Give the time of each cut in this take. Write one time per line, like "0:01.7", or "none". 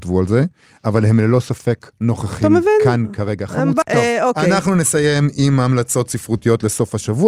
0:03.8